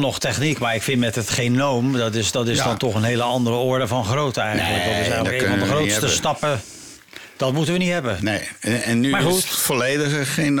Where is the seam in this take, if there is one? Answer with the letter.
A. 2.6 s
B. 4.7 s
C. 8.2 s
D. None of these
D